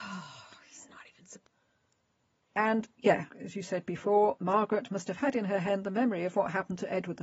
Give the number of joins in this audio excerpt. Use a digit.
0